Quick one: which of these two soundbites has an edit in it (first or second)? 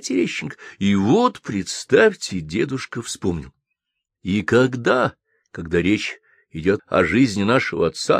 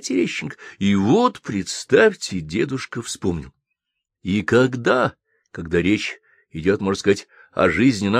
first